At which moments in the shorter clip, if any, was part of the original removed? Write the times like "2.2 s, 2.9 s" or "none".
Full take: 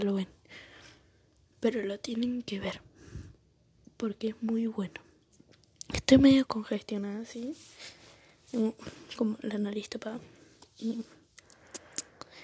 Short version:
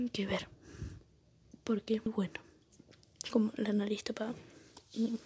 2.1 s, 3.2 s